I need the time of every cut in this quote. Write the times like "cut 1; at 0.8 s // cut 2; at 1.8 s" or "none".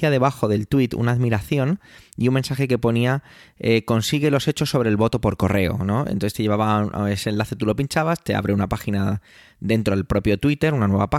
none